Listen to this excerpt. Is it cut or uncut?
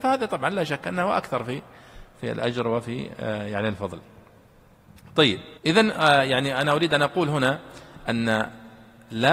cut